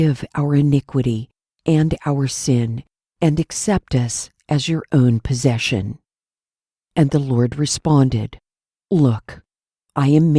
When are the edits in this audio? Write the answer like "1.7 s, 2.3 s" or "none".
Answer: none